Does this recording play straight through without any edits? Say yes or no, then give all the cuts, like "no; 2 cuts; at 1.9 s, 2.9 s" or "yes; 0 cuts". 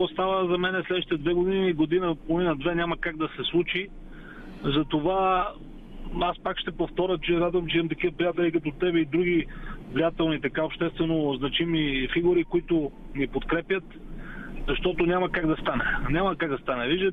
yes; 0 cuts